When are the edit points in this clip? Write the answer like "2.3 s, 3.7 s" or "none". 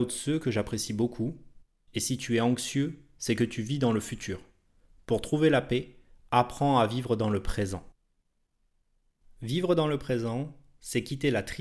1.8 s